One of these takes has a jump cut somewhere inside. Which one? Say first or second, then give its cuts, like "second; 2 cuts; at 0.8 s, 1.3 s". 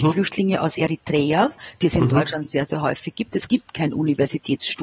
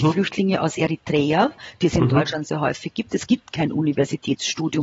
second; 1 cut; at 2.4 s